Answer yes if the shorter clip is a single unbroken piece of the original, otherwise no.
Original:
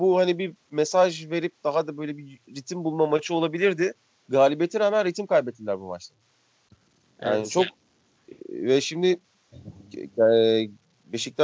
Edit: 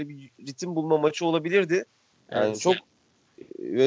no